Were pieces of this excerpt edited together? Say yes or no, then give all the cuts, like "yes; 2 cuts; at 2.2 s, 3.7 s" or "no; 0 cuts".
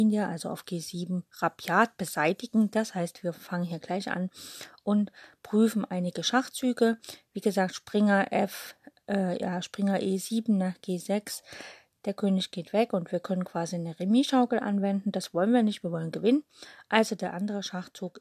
no; 0 cuts